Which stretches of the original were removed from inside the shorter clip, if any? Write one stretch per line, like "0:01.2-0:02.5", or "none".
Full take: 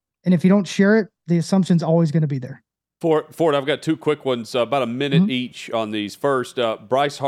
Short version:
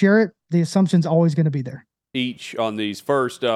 0:02.9-0:05.3